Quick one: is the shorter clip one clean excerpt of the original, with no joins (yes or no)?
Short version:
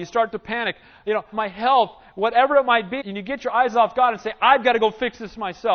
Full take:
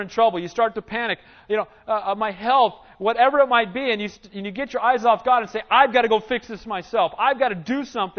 no